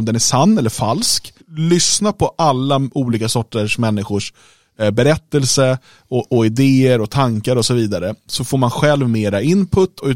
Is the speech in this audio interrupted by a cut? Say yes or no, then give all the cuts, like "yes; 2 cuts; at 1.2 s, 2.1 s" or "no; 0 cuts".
yes; 1 cut; at 1.4 s